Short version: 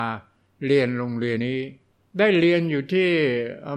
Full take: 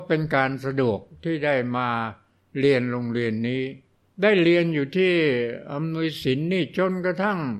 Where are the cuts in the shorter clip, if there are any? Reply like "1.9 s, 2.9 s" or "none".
1.4 s